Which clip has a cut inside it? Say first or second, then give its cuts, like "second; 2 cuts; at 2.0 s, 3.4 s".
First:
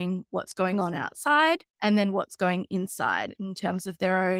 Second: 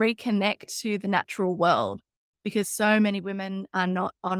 first; 1 cut; at 1.7 s